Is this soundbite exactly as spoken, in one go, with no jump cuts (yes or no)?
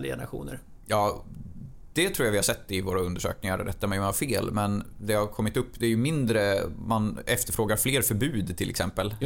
yes